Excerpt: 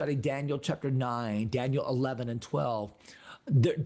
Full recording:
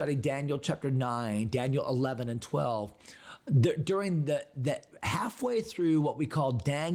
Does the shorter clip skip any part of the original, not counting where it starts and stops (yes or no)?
no